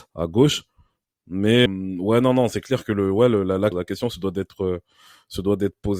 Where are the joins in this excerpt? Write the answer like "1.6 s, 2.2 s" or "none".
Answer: 1.7 s, 3.7 s